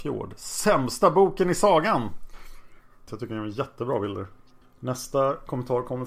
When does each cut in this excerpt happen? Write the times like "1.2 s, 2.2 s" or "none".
3.1 s, 4.6 s